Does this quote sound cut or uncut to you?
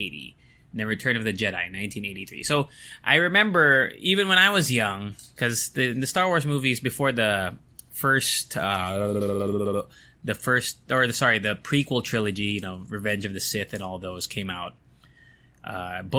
uncut